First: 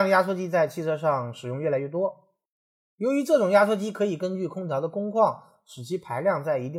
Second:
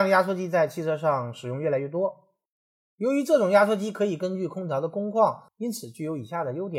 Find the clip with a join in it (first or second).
second